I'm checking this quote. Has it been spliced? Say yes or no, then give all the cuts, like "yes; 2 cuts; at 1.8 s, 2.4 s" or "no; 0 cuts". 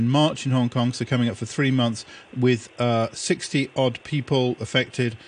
no; 0 cuts